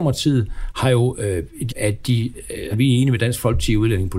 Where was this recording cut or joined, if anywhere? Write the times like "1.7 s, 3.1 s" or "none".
1.7 s, 2.7 s